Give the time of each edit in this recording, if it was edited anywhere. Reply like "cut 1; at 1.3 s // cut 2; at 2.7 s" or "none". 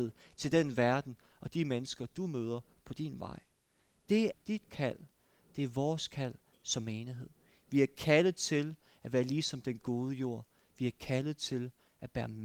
cut 1; at 4.3 s